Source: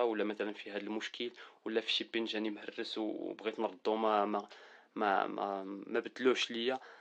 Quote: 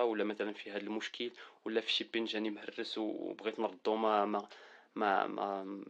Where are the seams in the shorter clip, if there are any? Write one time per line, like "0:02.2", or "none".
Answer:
none